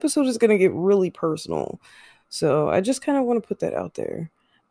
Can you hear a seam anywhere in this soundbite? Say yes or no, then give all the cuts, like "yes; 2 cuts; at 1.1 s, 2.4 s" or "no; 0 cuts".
no; 0 cuts